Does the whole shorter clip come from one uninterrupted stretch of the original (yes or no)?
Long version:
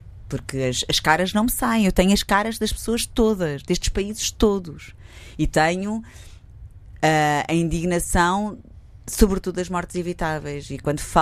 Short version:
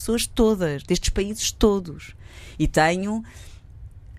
yes